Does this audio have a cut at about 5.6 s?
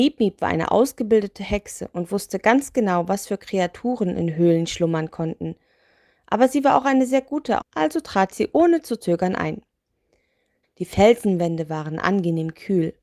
no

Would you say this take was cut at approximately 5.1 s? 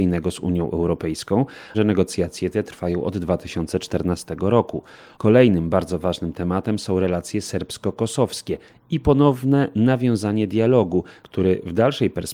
yes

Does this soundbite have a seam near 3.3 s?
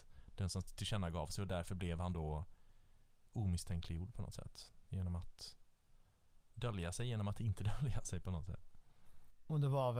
yes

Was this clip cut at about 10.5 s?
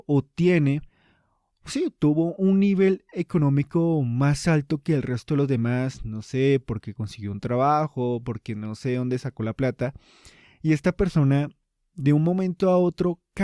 no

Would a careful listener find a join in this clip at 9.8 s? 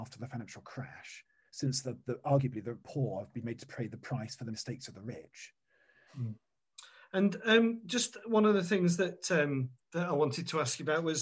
yes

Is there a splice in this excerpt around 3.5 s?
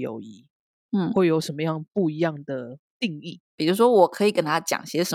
yes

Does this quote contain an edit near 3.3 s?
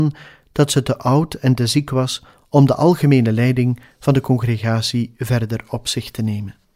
no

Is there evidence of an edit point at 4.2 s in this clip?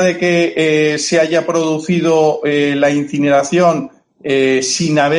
no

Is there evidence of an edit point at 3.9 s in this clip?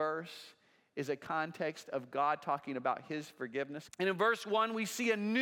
yes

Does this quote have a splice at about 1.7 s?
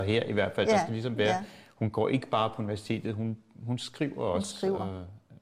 no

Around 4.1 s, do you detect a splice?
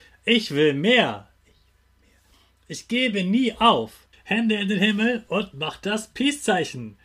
yes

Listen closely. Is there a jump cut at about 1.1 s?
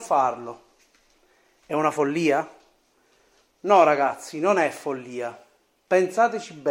no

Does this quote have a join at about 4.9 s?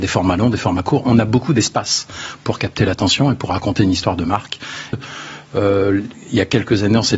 yes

